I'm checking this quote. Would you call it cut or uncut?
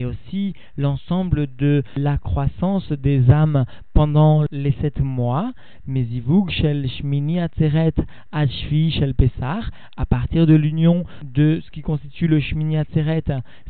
uncut